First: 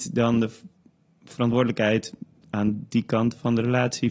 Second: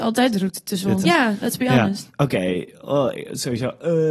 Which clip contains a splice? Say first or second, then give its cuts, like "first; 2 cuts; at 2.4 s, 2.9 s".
second; 2 cuts; at 1.0 s, 2.1 s